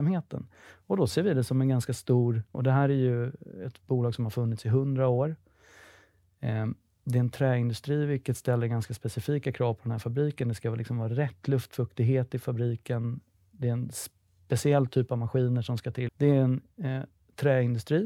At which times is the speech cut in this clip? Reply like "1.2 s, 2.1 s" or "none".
2.5 s, 16.1 s